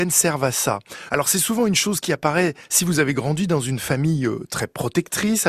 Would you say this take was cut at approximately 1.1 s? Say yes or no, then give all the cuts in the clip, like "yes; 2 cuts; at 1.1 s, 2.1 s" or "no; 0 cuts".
yes; 1 cut; at 1.1 s